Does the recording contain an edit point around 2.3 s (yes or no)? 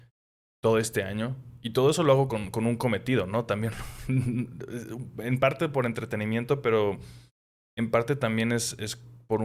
no